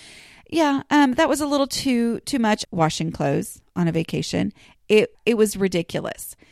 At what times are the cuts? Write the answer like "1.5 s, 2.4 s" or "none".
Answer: 2.6 s, 5.1 s